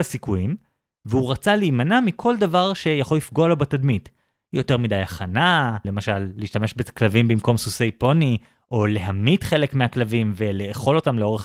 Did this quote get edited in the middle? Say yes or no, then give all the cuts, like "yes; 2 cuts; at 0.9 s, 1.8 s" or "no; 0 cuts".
yes; 1 cut; at 5.8 s